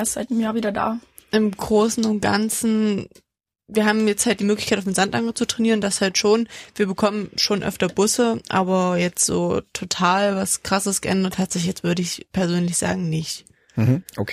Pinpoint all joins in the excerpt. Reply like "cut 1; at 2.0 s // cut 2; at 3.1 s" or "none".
none

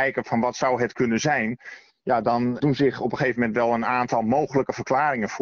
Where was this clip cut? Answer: cut 1; at 2.6 s

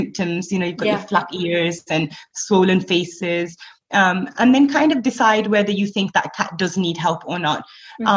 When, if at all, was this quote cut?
none

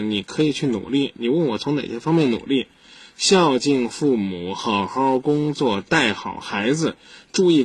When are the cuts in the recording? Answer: none

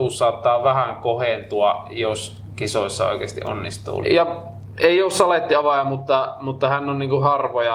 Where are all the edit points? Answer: cut 1; at 4.0 s

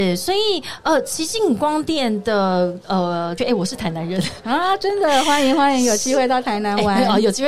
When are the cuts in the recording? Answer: cut 1; at 3.4 s

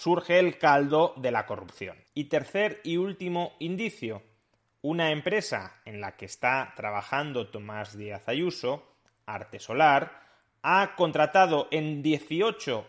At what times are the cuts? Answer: cut 1; at 2.1 s

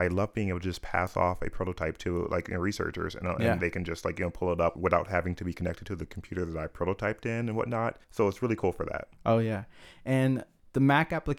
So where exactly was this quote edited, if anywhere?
cut 1; at 8.0 s // cut 2; at 9.2 s

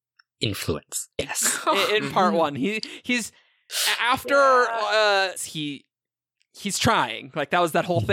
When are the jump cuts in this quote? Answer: cut 1; at 1.2 s // cut 2; at 5.4 s

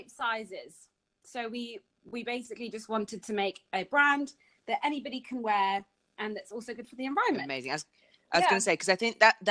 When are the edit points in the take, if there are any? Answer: none

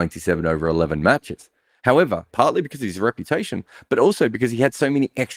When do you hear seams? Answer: cut 1; at 2.3 s

